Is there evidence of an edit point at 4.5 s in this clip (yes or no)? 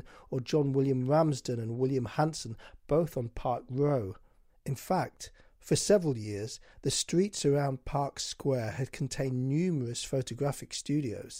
yes